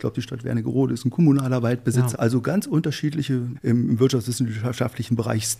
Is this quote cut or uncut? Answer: cut